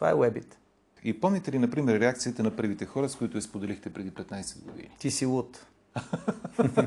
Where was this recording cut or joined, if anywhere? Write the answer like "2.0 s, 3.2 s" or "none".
1.0 s